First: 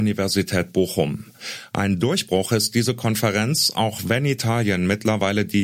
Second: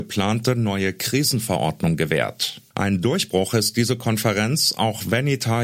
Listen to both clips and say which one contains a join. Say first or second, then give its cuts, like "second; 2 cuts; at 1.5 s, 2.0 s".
second; 1 cut; at 2.7 s